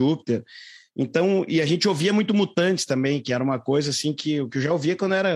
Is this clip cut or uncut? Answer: uncut